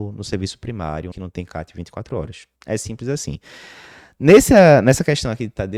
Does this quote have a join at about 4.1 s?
no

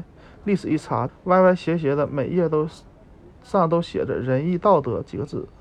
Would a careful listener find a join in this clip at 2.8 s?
no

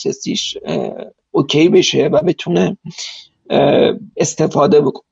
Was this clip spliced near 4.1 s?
yes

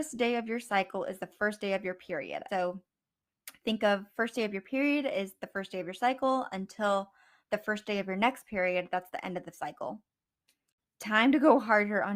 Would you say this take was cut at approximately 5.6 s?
no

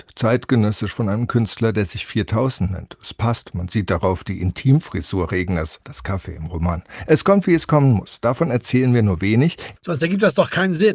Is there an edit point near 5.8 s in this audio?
yes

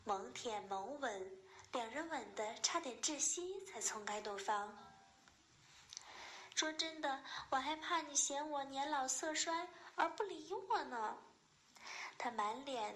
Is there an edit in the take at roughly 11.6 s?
no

